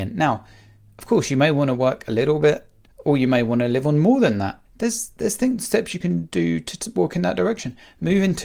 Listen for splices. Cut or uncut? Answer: cut